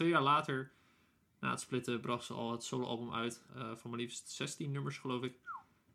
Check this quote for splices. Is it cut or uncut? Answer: cut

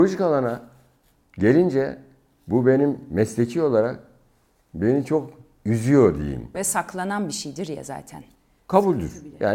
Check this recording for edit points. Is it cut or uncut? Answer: cut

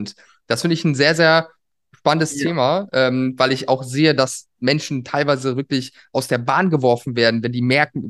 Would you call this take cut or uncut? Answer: uncut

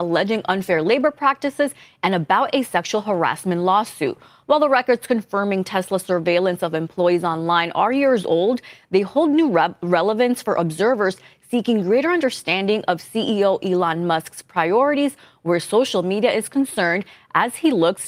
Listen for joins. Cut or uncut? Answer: uncut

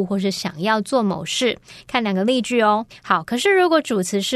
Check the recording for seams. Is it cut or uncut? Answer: cut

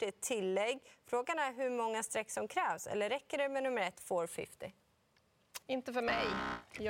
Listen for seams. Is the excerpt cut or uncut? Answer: cut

